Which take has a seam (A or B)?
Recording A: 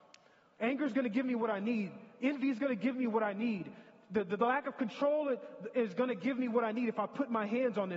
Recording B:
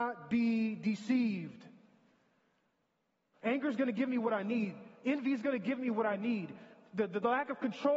B